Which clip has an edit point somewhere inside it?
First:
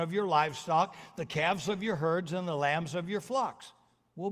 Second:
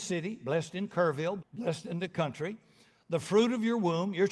second; 1 cut; at 1.4 s

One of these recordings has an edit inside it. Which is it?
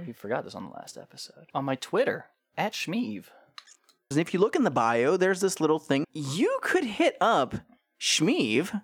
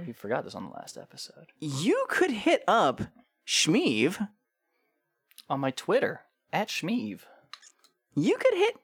first; 3 cuts; at 1.5 s, 4.1 s, 6.0 s

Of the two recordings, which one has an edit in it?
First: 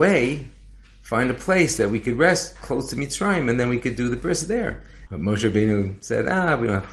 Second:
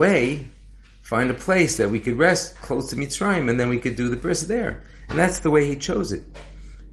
first; 1 cut; at 5.1 s

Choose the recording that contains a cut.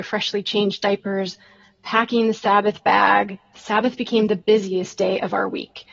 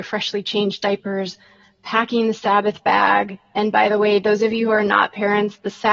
first; 1 cut; at 3.5 s

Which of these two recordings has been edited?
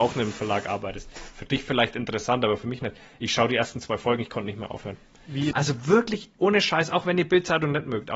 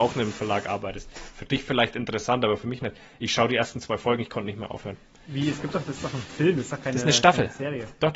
first; 1 cut; at 5.5 s

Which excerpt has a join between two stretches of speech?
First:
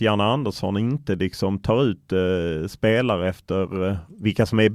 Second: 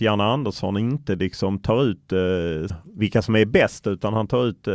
second; 1 cut; at 2.7 s

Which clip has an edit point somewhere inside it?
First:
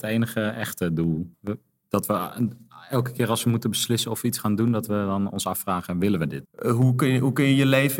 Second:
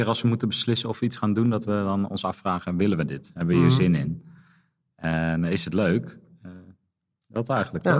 first; 2 cuts; at 1.3 s, 6.4 s

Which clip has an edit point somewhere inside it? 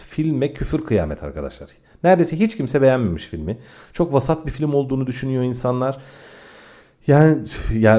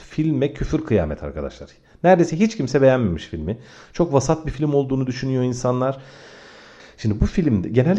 second; 1 cut; at 6.8 s

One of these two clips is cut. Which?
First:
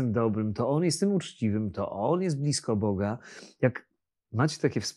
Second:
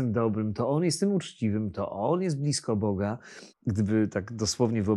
second; 1 cut; at 3.5 s

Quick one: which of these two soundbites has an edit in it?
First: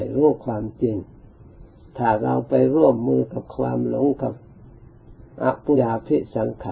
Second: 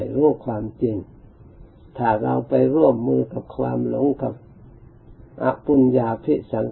first; 1 cut; at 5.7 s

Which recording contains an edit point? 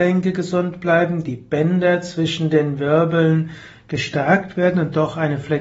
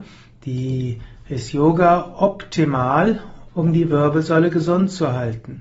second; 1 cut; at 3.5 s

